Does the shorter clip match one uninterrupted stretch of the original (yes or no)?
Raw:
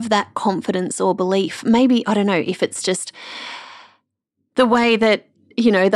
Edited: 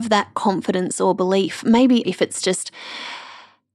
no